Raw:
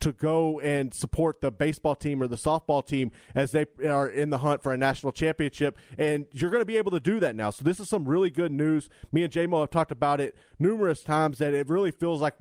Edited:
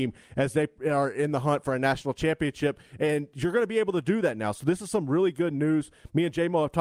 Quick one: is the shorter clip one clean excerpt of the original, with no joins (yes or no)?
yes